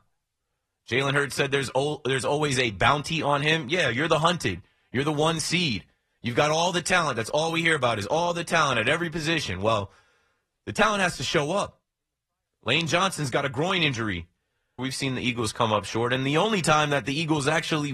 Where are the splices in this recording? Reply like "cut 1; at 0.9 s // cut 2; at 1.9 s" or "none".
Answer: cut 1; at 12.5 s // cut 2; at 14.8 s